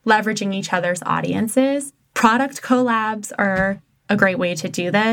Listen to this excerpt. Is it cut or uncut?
uncut